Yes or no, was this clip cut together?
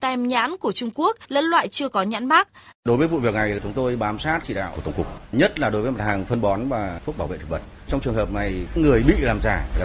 yes